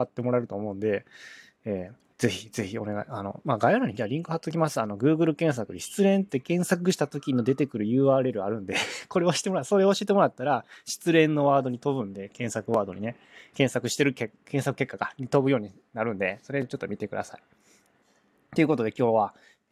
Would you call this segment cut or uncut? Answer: cut